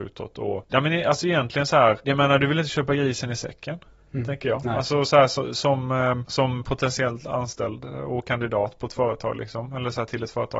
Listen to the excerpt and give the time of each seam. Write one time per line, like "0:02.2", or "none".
none